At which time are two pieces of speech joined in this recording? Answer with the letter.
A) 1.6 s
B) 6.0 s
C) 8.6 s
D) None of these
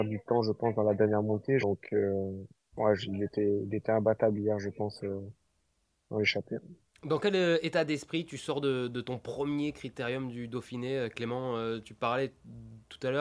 A